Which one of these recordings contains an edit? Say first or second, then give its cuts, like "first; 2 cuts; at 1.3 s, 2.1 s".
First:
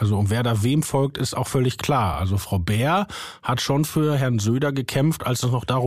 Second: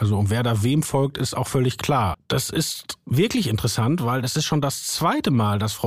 second; 1 cut; at 2.1 s